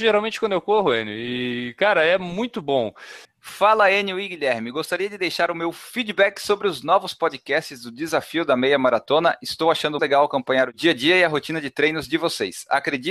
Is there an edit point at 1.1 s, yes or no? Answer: no